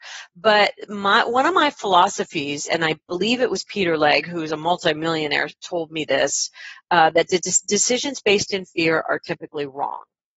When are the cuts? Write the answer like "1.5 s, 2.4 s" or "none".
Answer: none